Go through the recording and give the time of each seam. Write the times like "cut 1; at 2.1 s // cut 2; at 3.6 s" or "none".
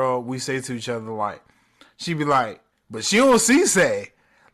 cut 1; at 2.7 s